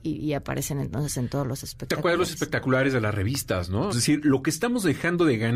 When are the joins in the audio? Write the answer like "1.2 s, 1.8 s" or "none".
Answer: 3.9 s